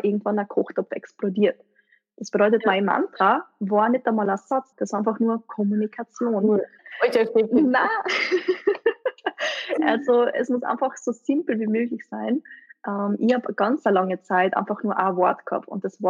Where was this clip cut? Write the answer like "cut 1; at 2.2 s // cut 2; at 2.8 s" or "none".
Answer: cut 1; at 4.7 s // cut 2; at 6.8 s